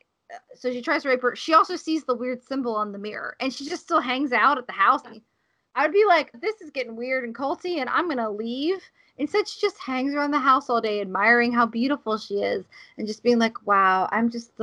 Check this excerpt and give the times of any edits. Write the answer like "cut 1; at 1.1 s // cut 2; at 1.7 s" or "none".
cut 1; at 5.0 s // cut 2; at 6.3 s